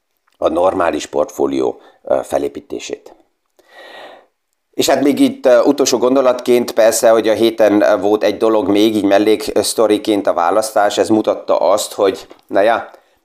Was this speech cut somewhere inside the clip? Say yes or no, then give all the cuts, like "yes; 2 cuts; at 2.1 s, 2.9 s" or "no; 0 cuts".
no; 0 cuts